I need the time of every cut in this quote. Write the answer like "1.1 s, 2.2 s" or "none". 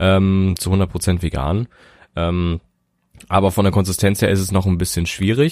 none